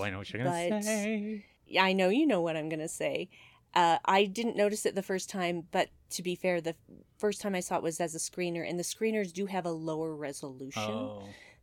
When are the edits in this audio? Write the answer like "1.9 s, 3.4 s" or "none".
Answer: none